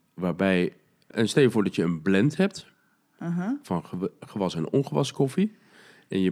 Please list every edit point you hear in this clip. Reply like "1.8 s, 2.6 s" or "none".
1.1 s